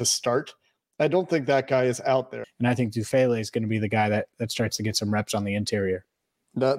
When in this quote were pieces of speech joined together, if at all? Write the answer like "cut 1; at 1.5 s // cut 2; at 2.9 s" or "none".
cut 1; at 2.4 s